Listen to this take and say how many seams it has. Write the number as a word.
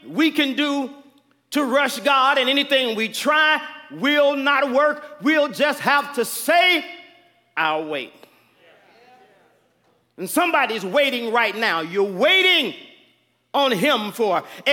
zero